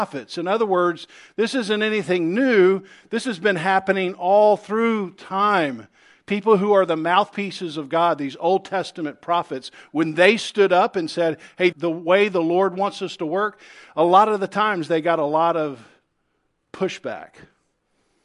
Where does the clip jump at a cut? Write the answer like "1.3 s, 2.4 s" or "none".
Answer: 11.7 s